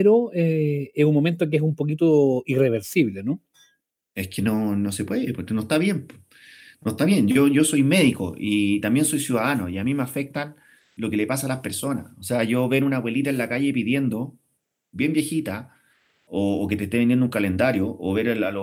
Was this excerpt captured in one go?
yes; 0 cuts

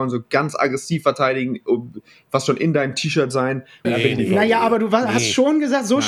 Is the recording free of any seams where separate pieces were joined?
no; 1 cut; at 3.8 s

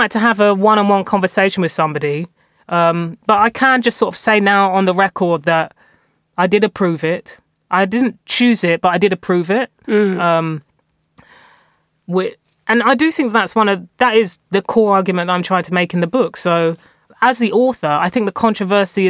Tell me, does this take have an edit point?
yes; 2 cuts; at 9.8 s, 17.1 s

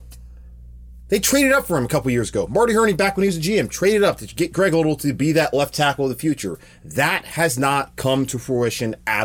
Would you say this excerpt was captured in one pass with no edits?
yes; 0 cuts

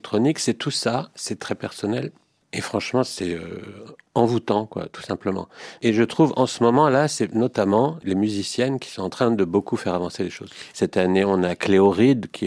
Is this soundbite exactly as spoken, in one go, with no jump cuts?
no; 1 cut; at 10.7 s

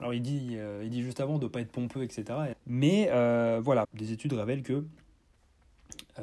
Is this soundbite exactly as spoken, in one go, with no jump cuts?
no; 2 cuts; at 2.5 s, 3.8 s

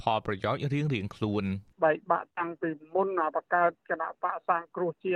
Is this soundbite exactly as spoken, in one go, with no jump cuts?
no; 1 cut; at 1.7 s

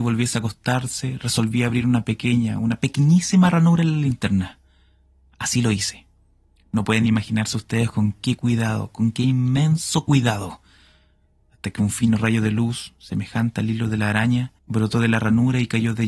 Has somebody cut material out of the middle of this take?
yes; 1 cut; at 14.6 s

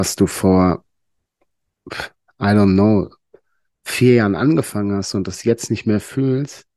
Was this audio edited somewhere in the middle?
no; 0 cuts

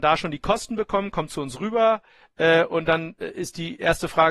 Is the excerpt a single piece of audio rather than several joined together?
yes; 0 cuts

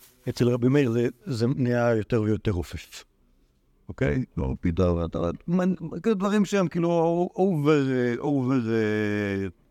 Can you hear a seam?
no; 0 cuts

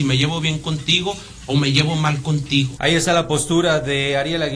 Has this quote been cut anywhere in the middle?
yes; 1 cut; at 2.8 s

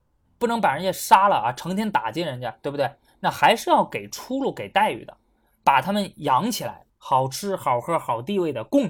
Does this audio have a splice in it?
no; 0 cuts

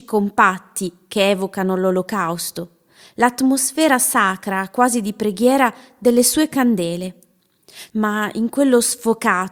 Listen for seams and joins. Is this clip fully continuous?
no; 1 cut; at 7.9 s

